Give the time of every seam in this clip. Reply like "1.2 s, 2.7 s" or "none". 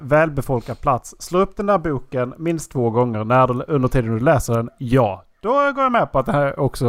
none